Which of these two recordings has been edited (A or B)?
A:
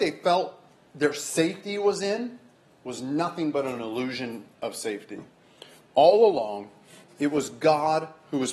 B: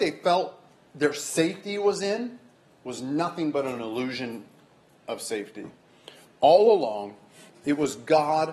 A